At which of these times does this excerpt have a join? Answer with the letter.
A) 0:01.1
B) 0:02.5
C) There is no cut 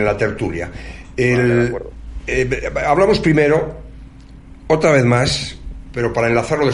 A